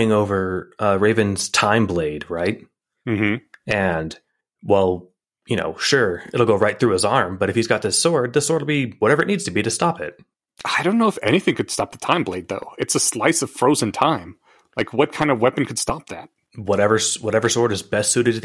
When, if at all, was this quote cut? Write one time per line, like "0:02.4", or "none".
none